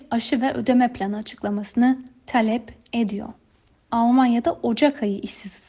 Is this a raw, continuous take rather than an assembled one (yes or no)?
no